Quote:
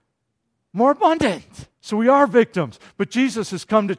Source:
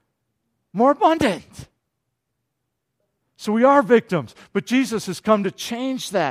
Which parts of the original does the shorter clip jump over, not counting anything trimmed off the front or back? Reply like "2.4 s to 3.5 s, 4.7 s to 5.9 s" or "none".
1.7 s to 3.3 s